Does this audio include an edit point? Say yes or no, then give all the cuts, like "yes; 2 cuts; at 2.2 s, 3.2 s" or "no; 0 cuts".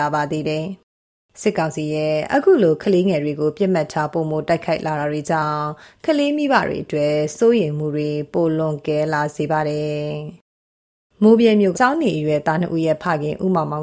yes; 1 cut; at 11.7 s